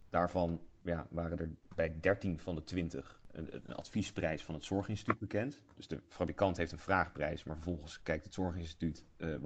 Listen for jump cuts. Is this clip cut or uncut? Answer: uncut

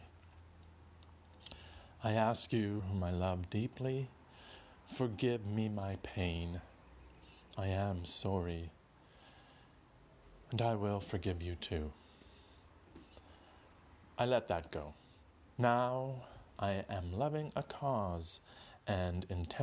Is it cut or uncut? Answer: cut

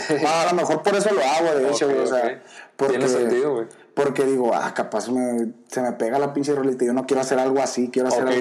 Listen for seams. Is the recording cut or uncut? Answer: uncut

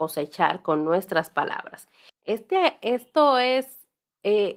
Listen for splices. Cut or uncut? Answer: cut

